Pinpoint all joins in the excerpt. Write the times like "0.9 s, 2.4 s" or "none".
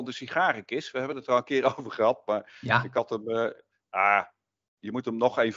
none